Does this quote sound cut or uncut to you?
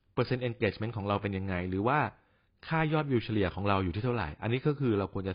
uncut